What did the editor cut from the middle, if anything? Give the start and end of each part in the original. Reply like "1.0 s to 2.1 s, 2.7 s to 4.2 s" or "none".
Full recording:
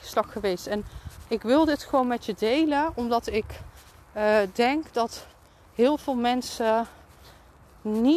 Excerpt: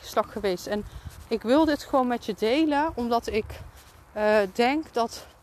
none